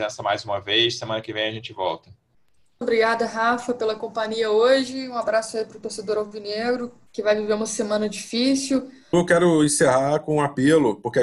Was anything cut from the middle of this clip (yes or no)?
yes